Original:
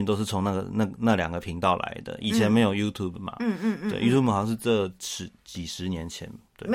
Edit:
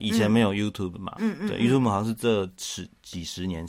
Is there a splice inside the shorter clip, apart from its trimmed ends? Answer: yes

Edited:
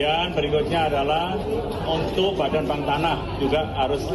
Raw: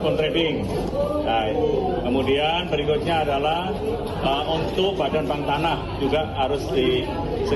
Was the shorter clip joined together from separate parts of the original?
yes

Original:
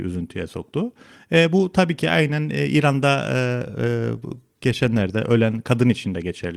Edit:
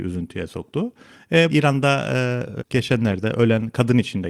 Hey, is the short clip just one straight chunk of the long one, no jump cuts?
no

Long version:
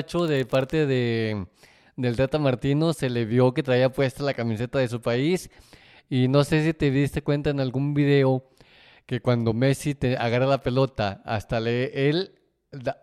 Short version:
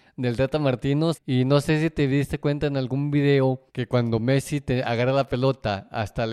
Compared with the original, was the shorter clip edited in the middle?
yes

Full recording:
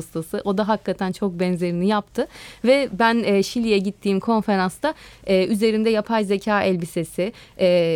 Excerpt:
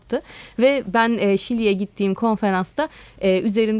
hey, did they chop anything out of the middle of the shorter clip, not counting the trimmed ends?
no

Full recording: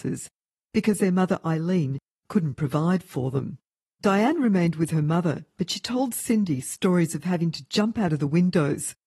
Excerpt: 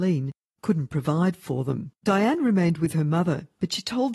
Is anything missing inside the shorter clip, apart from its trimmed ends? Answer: yes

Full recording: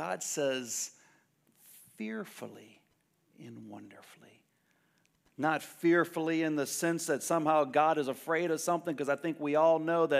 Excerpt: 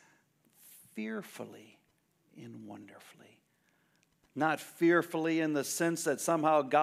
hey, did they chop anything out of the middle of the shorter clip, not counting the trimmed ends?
no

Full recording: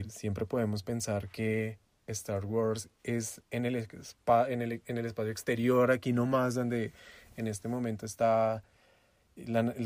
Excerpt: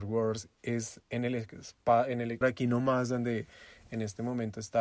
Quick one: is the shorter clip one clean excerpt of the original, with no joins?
no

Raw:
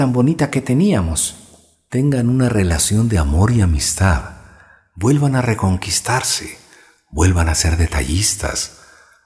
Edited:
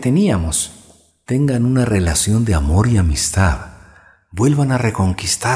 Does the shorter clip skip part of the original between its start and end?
no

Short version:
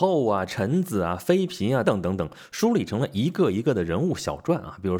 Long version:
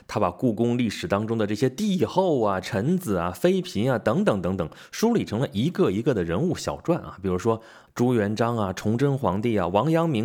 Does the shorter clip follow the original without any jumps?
no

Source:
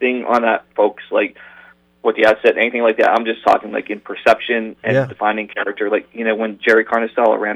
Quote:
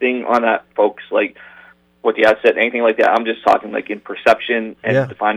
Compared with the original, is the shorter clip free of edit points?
yes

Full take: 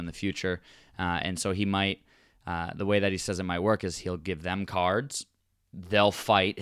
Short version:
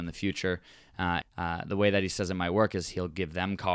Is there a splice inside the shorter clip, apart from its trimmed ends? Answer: yes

